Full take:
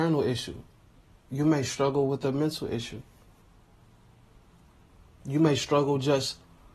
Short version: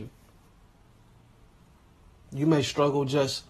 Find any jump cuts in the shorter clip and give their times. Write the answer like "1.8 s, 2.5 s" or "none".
none